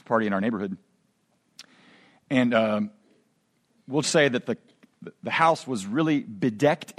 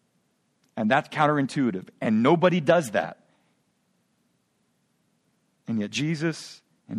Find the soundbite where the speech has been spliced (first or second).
first